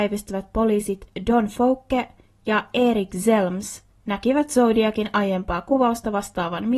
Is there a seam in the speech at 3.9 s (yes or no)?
yes